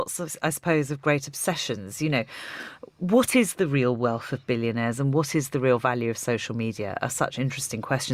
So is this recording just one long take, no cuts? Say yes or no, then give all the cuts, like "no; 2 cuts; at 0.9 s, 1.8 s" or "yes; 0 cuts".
yes; 0 cuts